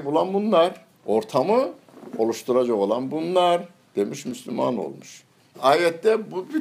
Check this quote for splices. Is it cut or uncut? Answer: cut